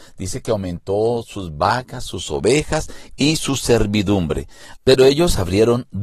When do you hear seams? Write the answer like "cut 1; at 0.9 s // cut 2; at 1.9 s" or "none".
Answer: cut 1; at 4.8 s